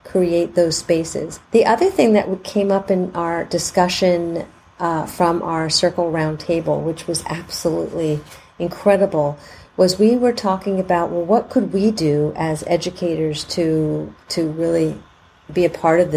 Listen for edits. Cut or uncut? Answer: uncut